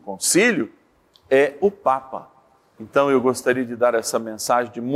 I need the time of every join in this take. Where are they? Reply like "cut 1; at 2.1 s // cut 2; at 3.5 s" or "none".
cut 1; at 2.8 s